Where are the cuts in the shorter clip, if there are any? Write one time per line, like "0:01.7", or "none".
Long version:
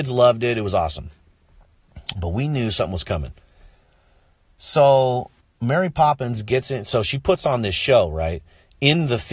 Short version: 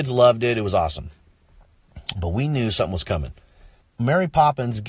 0:03.8